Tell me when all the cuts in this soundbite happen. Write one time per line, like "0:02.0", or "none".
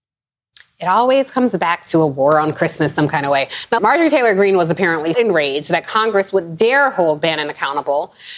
0:03.8
0:05.1